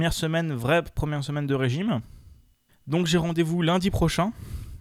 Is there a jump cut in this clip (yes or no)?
yes